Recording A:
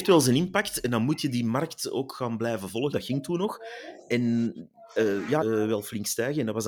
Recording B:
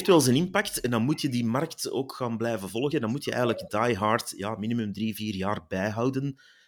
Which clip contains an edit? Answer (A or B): A